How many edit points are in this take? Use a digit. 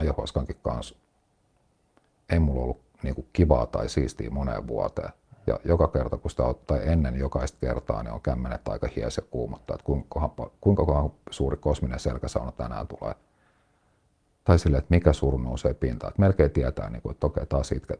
0